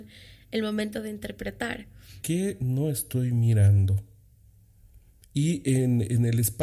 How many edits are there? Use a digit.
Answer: 1